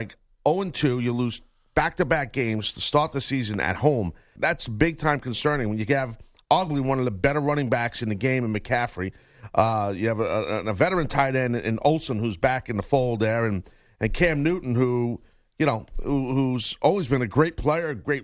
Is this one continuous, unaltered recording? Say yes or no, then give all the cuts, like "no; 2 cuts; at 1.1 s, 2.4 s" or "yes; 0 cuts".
no; 1 cut; at 4.4 s